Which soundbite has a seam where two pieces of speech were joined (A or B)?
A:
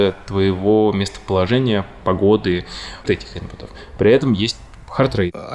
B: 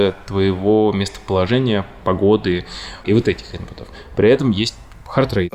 A